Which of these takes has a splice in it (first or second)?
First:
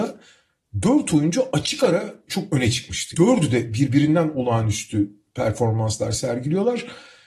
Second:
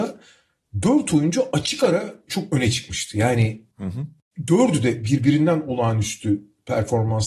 first